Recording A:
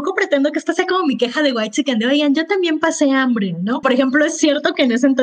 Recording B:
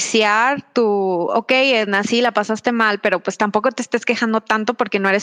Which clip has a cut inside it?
A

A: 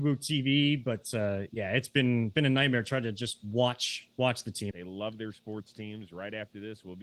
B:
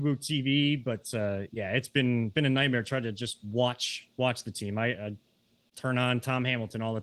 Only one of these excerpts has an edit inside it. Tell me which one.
A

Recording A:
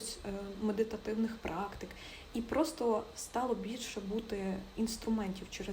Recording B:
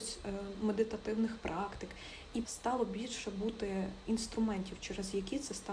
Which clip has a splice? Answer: B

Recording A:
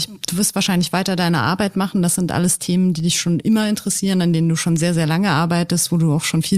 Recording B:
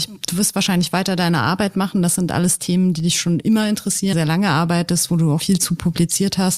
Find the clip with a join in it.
B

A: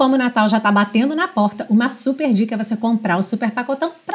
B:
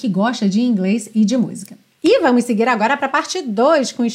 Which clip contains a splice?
B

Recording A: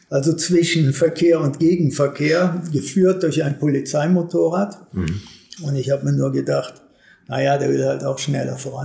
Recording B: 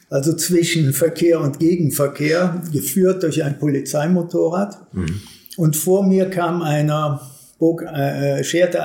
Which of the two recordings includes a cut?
A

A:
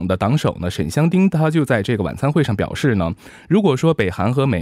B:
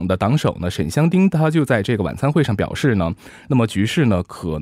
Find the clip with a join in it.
B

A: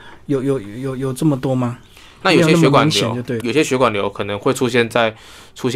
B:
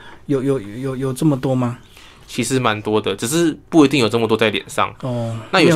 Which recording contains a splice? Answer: A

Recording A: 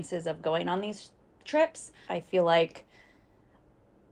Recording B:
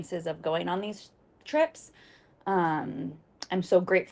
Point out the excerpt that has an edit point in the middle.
A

